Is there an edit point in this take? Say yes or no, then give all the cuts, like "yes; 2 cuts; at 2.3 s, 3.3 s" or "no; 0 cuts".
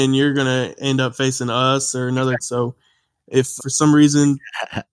yes; 2 cuts; at 2.4 s, 3.6 s